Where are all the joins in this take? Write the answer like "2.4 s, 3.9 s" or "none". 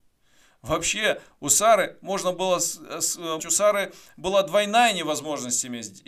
3.4 s